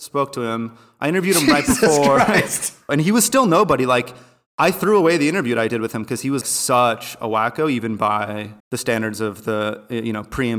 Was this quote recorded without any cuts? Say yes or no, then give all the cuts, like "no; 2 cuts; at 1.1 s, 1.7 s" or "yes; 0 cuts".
no; 3 cuts; at 2.9 s, 6.4 s, 8.6 s